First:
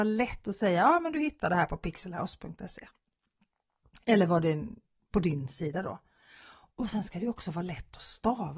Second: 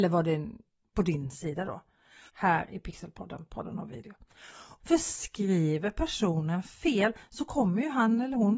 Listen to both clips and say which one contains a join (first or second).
second